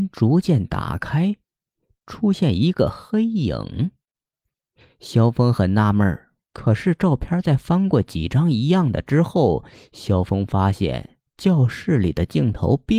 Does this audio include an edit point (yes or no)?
yes